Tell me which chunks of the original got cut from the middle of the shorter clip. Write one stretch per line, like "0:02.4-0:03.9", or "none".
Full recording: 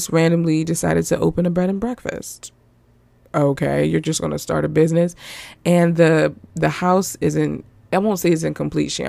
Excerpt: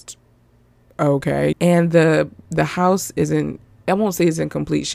0:03.9-0:05.6